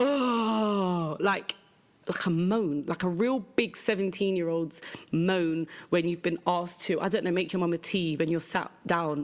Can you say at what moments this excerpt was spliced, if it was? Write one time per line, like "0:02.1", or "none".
none